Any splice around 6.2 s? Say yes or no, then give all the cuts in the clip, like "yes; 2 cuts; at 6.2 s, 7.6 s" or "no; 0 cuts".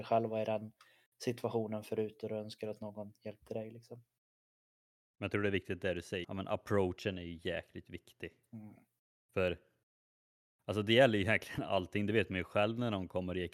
yes; 1 cut; at 6.2 s